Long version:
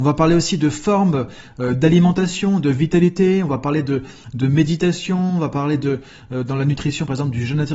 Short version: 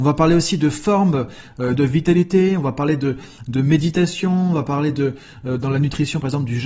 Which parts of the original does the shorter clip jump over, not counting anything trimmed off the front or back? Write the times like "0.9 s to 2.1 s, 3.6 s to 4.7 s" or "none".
1.8 s to 2.6 s